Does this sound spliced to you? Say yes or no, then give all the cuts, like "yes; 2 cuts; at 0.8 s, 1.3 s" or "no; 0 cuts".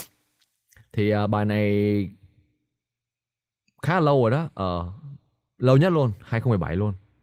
no; 0 cuts